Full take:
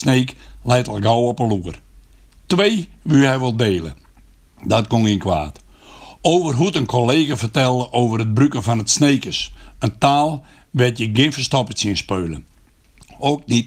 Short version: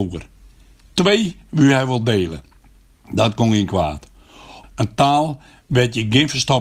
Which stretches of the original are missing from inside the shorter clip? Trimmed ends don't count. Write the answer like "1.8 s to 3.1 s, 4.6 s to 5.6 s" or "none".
6.2 s to 9.7 s